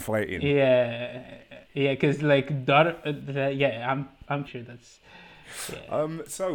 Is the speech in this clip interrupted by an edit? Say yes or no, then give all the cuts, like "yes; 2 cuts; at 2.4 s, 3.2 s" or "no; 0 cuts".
yes; 2 cuts; at 1.6 s, 4.5 s